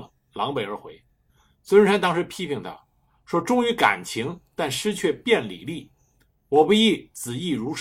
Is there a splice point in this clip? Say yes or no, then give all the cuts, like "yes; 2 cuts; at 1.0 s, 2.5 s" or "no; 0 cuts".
no; 0 cuts